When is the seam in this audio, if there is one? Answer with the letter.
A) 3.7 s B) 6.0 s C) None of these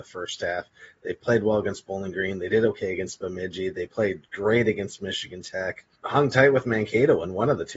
B